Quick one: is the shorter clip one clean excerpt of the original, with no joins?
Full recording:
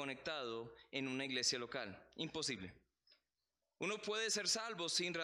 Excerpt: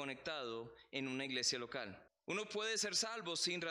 no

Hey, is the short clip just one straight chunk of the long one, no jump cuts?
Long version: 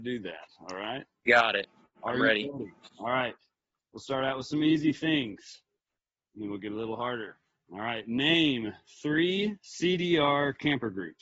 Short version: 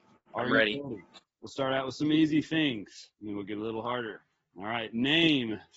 no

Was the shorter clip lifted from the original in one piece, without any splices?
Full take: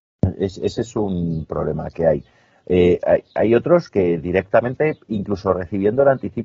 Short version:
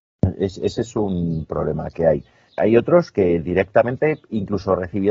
no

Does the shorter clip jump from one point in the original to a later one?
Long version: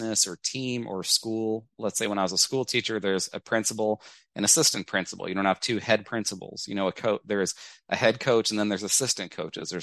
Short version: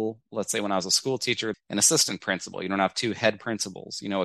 yes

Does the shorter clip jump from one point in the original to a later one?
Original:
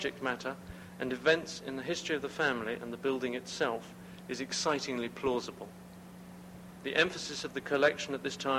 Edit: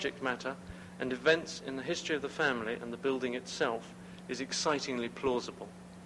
no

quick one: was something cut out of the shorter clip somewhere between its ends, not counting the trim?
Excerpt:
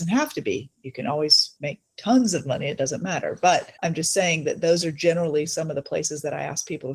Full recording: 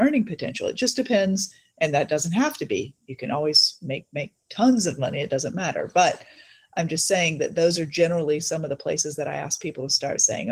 yes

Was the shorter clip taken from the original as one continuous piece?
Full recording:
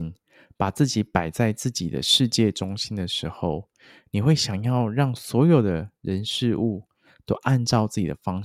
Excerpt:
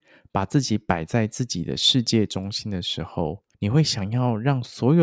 no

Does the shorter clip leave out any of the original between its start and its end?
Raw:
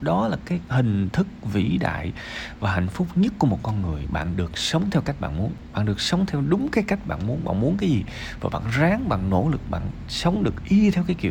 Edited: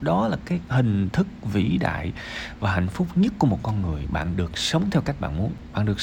no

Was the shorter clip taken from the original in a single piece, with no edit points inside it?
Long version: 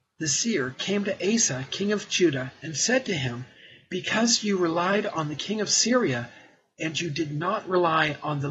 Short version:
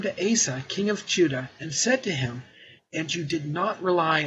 no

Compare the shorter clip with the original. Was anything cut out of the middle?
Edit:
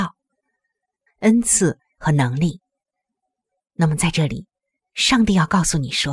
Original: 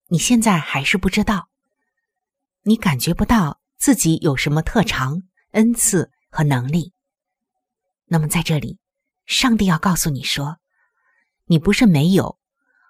yes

